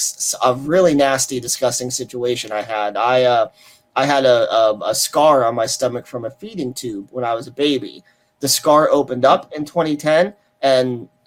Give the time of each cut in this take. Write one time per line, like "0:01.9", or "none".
none